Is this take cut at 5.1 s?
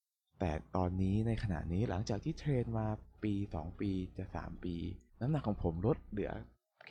yes; 1 cut; at 5.1 s

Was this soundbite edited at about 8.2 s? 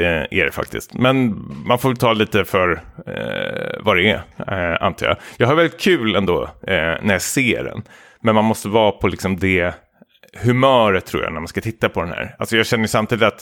no; 0 cuts

